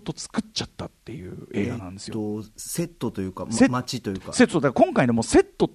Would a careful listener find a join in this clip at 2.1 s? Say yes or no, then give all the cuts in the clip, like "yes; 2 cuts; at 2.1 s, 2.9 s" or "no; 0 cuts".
no; 0 cuts